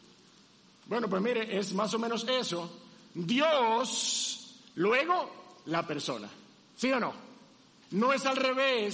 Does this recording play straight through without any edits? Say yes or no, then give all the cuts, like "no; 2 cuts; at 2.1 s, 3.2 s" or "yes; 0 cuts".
no; 1 cut; at 7.8 s